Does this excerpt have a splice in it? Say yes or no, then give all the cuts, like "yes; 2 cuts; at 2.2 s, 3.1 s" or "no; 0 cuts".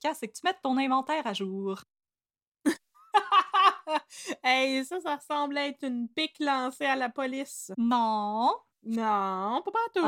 no; 0 cuts